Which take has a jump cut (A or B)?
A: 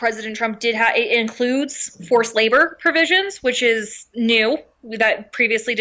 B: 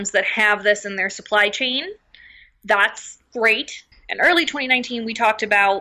B